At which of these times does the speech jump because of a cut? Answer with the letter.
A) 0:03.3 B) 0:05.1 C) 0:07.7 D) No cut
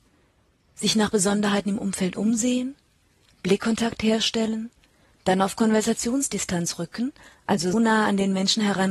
C